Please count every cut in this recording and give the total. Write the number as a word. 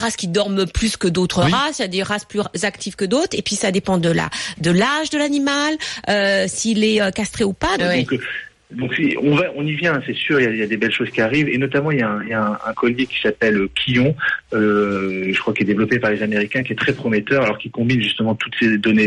one